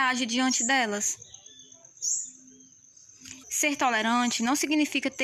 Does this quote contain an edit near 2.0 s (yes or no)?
no